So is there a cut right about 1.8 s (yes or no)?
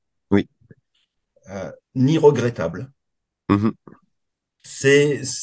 yes